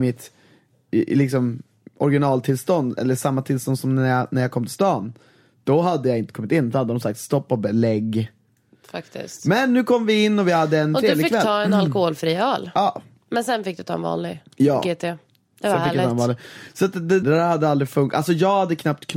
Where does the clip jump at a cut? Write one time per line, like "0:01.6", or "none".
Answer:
0:17.2